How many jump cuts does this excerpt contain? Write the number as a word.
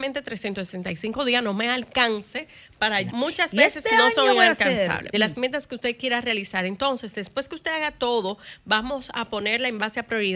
two